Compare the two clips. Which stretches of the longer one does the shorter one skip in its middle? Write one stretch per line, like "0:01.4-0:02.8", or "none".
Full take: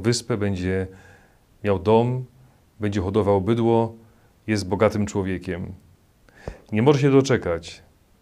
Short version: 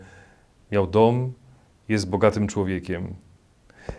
0:02.7-0:04.4